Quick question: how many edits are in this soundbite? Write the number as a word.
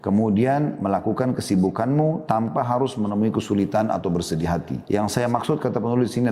one